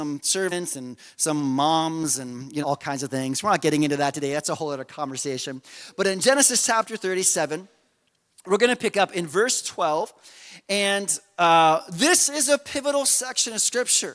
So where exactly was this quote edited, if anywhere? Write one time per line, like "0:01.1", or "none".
0:02.6